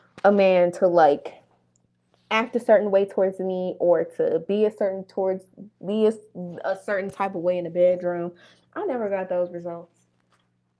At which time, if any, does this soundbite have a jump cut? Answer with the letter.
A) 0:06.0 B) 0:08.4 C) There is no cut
C